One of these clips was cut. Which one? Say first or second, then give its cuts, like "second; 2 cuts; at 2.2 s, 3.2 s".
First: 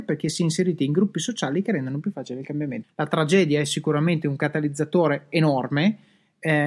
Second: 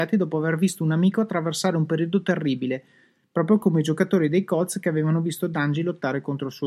first; 1 cut; at 2.8 s